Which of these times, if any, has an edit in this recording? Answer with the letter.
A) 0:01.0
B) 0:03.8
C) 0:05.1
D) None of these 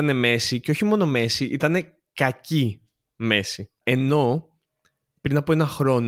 B